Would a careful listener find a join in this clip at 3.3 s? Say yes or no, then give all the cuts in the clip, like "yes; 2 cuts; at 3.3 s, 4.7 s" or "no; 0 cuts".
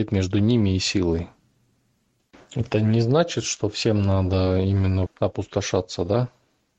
no; 1 cut; at 5.1 s